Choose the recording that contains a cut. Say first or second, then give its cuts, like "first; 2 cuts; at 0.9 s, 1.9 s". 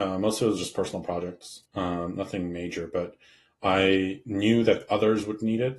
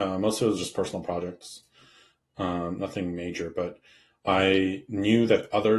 first; 1 cut; at 1.7 s